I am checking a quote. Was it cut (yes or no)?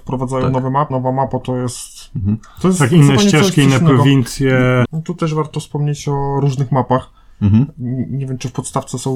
yes